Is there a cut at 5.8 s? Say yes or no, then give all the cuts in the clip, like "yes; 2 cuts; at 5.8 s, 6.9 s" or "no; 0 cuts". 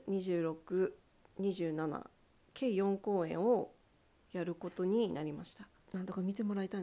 yes; 1 cut; at 5.8 s